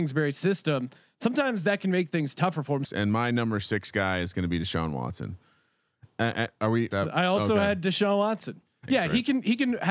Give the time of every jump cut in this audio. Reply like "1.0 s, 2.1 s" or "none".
2.8 s, 6.9 s, 8.9 s